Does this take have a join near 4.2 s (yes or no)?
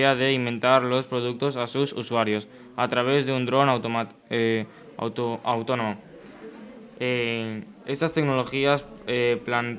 no